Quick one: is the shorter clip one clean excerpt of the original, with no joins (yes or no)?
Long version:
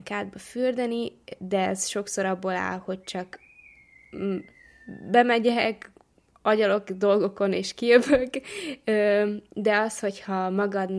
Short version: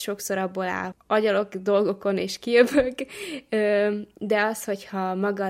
no